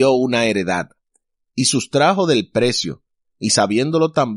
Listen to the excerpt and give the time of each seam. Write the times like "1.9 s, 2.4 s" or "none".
none